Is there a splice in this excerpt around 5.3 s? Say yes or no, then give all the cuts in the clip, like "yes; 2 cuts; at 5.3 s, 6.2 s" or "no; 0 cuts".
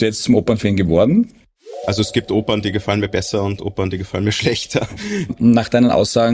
yes; 1 cut; at 5.3 s